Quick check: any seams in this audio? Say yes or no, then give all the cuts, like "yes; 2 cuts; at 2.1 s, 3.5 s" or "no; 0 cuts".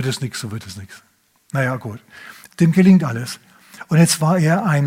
yes; 1 cut; at 2.5 s